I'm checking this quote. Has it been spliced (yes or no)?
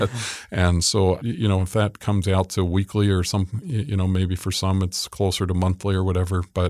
no